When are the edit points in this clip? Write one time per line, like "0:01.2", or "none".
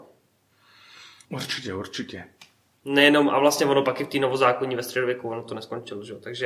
0:01.2